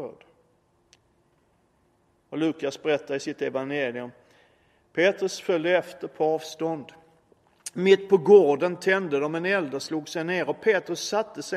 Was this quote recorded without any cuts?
yes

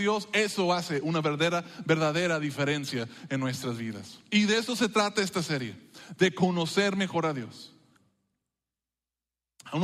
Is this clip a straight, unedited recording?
yes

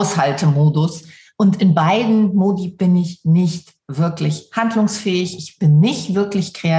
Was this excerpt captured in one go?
yes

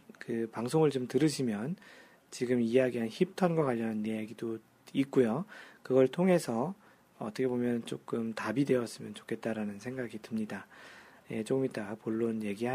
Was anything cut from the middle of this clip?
no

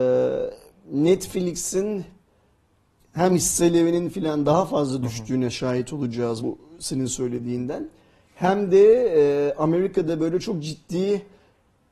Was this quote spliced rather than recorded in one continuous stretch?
yes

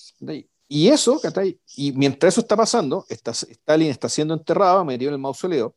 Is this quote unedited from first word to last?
yes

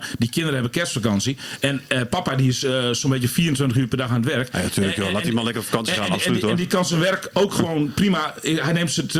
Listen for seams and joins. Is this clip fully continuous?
yes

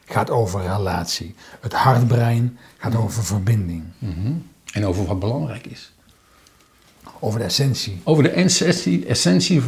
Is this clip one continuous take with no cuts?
yes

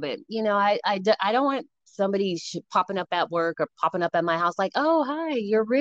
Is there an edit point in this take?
no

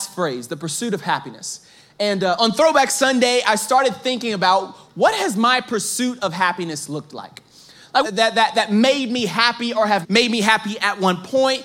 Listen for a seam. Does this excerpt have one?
yes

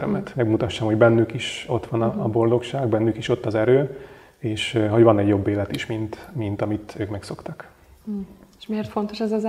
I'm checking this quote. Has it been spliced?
no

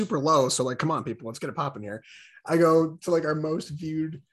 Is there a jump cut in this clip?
no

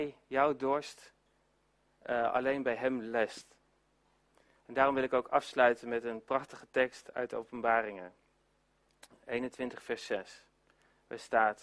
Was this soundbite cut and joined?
no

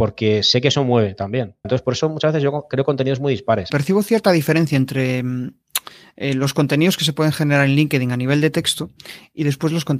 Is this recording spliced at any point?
yes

